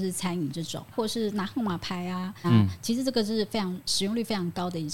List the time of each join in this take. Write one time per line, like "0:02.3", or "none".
0:00.9
0:02.4